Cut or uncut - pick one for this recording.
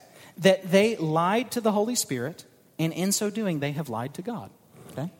uncut